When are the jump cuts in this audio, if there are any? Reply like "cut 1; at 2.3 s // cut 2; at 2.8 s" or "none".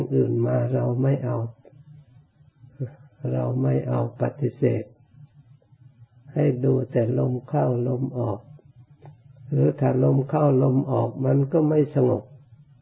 none